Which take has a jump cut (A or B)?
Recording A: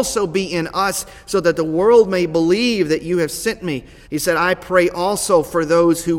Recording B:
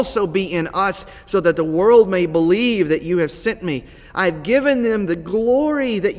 A